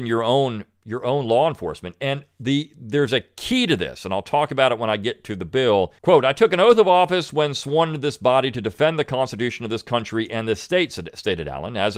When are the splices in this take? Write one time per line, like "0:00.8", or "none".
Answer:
0:06.0